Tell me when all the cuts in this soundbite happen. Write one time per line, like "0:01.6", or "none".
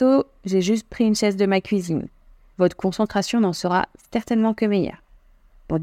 0:02.5